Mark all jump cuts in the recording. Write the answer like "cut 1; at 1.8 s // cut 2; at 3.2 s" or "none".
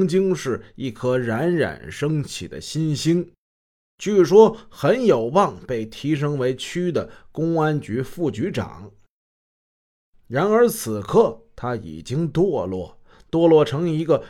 none